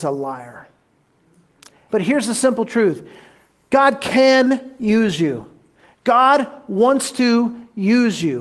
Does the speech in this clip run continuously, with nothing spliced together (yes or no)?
no